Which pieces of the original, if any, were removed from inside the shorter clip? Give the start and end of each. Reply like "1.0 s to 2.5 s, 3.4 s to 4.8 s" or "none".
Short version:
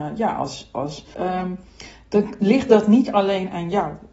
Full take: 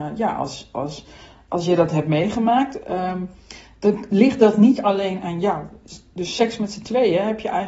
1.1 s to 2.8 s